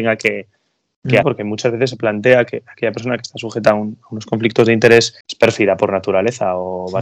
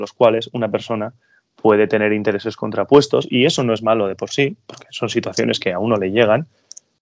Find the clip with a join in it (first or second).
first